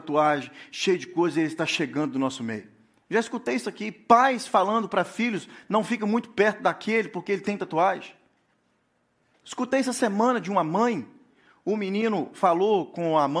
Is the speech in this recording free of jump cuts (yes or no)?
no